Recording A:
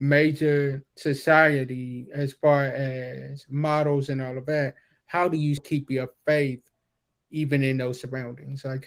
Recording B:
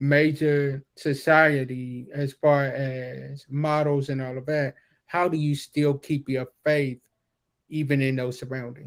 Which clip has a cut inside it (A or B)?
A